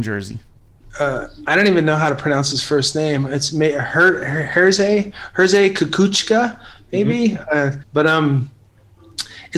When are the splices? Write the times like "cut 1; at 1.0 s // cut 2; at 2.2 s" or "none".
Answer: cut 1; at 7.8 s